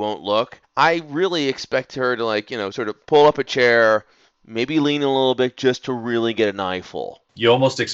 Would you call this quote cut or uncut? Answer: uncut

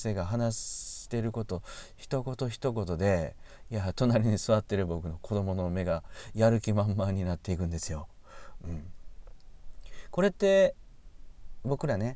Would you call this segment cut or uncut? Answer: cut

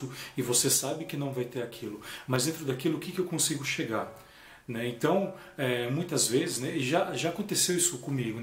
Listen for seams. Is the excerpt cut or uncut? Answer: uncut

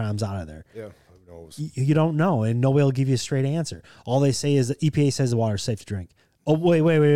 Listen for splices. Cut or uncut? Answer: uncut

